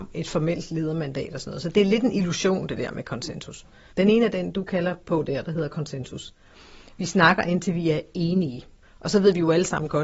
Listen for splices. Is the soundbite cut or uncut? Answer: cut